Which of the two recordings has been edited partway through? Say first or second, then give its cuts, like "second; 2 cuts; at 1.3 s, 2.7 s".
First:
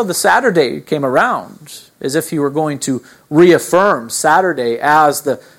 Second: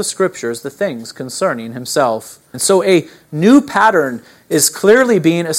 second; 1 cut; at 2.5 s